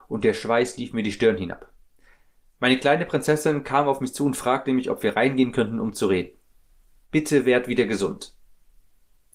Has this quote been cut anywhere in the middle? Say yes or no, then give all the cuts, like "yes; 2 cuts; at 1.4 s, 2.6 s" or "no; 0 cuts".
yes; 1 cut; at 7.0 s